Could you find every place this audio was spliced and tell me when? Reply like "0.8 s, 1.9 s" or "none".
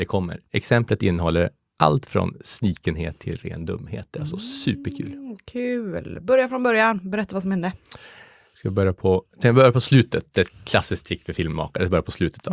none